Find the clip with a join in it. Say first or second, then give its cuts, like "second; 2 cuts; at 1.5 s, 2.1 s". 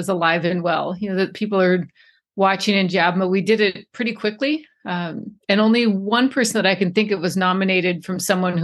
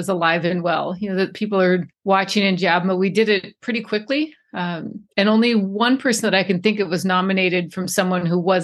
second; 1 cut; at 1.9 s